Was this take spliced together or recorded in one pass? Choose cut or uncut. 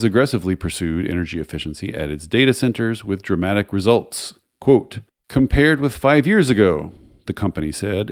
uncut